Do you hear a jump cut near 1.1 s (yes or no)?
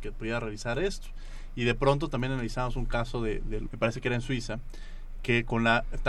no